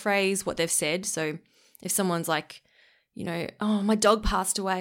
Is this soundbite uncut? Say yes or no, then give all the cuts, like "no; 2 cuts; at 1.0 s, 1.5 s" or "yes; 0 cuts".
yes; 0 cuts